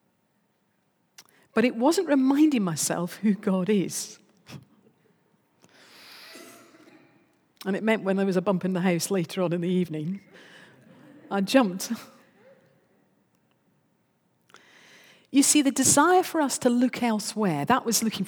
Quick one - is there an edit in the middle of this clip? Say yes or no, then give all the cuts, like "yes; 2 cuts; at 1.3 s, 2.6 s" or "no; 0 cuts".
no; 0 cuts